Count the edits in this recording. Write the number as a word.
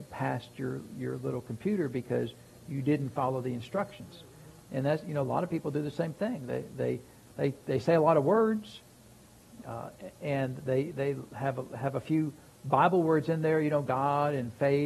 zero